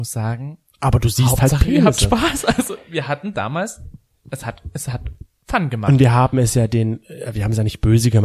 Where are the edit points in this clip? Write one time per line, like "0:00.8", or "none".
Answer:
none

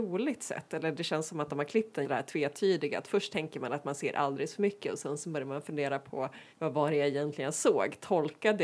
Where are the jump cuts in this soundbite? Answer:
0:02.0
0:06.5

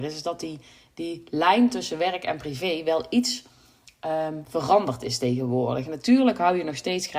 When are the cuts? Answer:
none

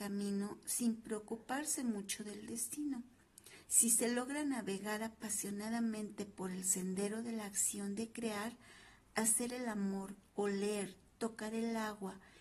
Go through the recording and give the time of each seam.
0:03.6
0:10.3

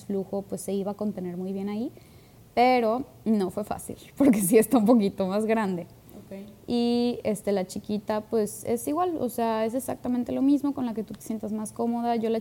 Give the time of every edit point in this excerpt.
none

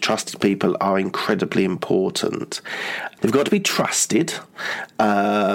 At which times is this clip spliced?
0:03.2

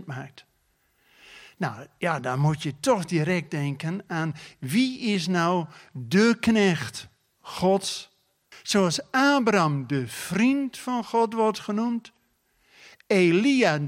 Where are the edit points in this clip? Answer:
0:08.5

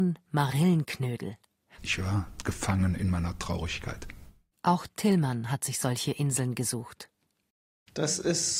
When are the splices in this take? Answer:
0:01.8
0:04.5

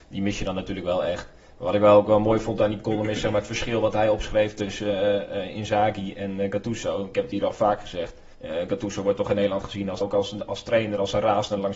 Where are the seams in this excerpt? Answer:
0:08.3
0:10.0

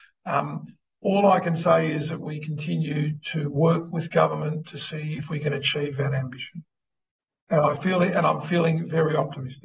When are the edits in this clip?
none

